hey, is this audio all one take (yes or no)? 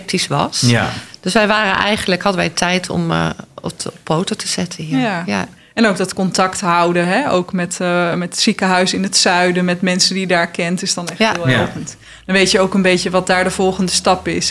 yes